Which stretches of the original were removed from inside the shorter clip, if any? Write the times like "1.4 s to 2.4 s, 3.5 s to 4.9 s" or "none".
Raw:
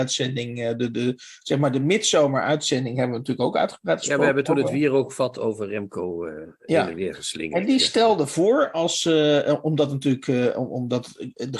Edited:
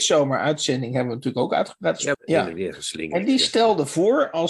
4.2 s to 6.5 s